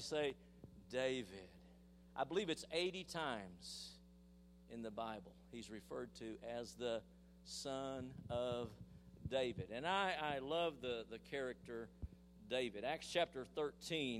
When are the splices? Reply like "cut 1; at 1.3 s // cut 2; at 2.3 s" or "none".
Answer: none